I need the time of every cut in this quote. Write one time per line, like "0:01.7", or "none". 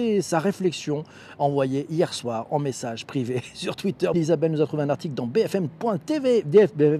0:04.1

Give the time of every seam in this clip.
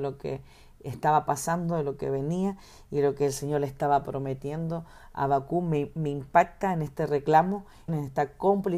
0:07.9

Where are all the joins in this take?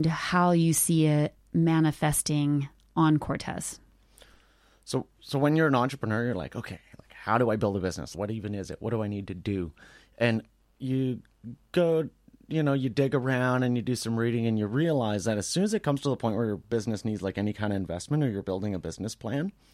0:08.1

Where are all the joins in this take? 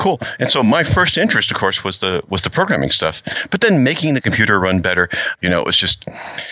0:05.3

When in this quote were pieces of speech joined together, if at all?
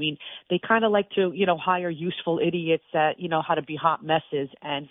none

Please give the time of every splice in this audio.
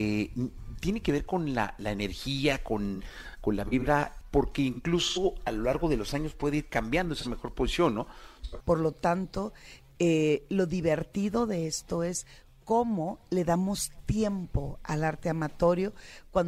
0:04.2
0:08.6

